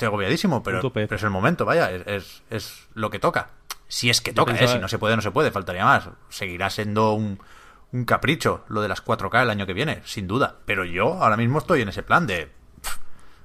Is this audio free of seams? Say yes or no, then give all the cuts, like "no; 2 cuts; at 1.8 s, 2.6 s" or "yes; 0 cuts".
yes; 0 cuts